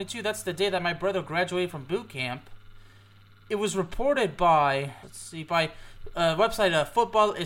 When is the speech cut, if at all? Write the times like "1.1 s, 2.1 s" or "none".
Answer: 5.0 s